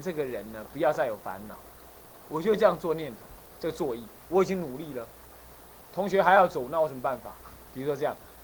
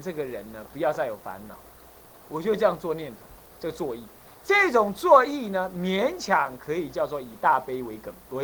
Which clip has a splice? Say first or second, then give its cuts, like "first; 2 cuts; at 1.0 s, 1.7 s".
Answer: first; 1 cut; at 4.3 s